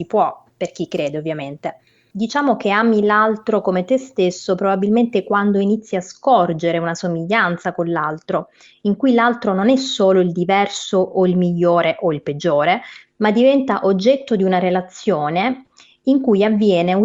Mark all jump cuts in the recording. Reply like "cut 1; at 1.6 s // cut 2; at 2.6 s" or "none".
cut 1; at 2.1 s

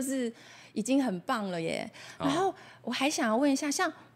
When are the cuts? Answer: none

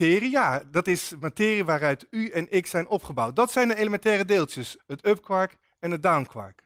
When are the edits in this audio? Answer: cut 1; at 4.8 s

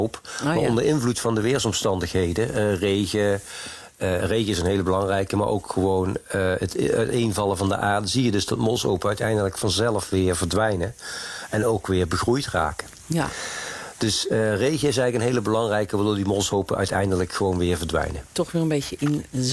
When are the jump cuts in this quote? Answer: none

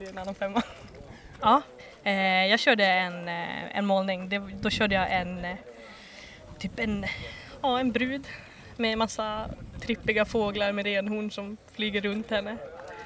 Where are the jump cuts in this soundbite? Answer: cut 1; at 1.4 s

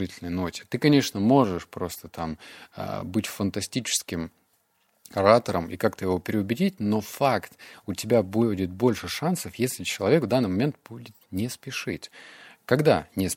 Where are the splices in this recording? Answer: none

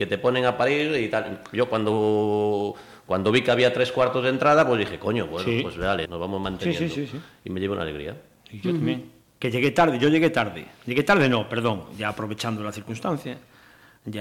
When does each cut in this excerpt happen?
cut 1; at 6.1 s

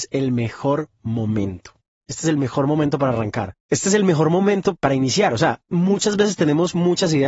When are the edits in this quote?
cut 1; at 2.0 s // cut 2; at 3.6 s

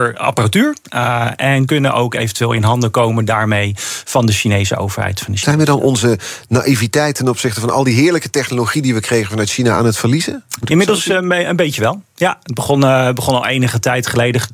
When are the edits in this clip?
none

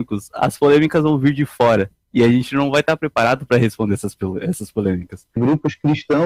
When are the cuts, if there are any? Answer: cut 1; at 5.4 s

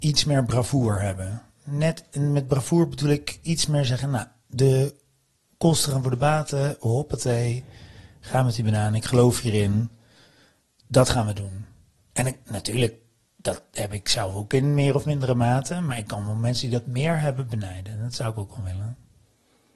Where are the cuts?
none

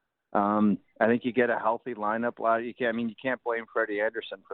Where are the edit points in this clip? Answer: none

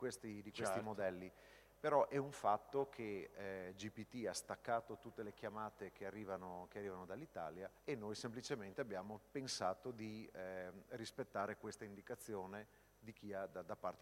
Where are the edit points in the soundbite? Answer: cut 1; at 7.8 s

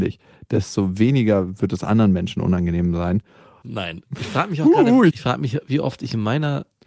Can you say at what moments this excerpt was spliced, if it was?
cut 1; at 3.6 s // cut 2; at 5.1 s

